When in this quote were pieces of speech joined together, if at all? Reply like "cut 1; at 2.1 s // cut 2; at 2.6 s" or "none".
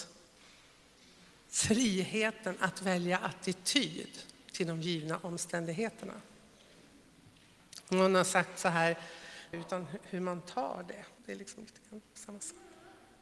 cut 1; at 9.5 s // cut 2; at 11.2 s